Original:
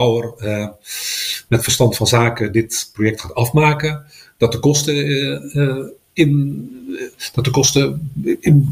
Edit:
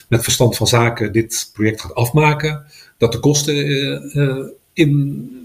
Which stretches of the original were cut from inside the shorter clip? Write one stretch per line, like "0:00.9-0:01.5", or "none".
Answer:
none